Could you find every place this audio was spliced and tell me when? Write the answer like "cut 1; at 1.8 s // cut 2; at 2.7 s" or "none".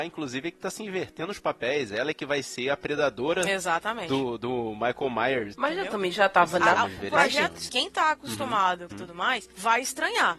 cut 1; at 5.5 s // cut 2; at 7.7 s // cut 3; at 8.9 s